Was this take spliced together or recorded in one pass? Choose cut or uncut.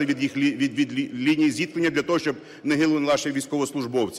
cut